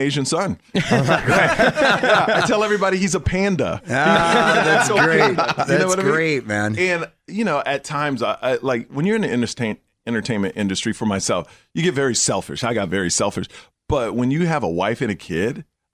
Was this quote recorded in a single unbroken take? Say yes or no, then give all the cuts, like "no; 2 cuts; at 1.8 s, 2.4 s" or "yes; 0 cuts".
yes; 0 cuts